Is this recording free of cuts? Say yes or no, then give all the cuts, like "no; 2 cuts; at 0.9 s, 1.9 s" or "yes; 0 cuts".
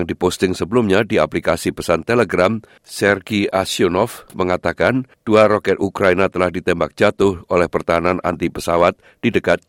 no; 1 cut; at 2.8 s